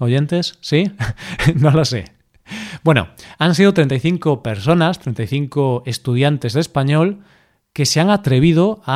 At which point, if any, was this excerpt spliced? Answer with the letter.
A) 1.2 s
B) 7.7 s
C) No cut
C